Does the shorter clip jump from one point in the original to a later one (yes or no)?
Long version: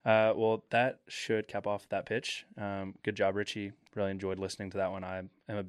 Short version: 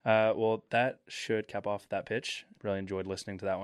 yes